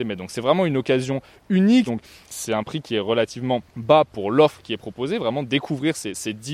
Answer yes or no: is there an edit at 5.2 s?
no